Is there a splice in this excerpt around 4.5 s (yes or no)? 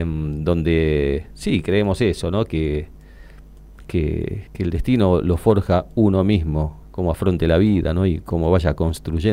yes